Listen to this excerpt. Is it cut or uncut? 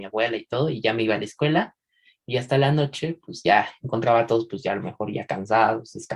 uncut